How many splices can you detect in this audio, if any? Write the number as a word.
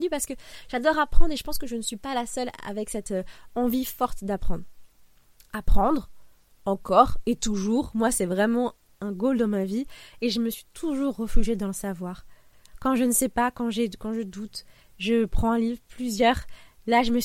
zero